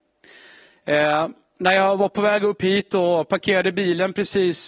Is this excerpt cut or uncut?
uncut